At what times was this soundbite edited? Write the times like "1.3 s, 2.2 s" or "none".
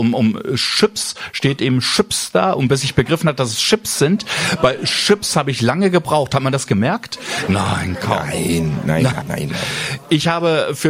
7.5 s, 9.2 s